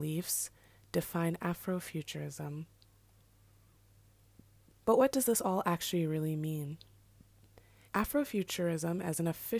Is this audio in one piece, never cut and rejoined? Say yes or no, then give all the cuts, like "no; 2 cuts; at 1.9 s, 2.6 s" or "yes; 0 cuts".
no; 1 cut; at 7.8 s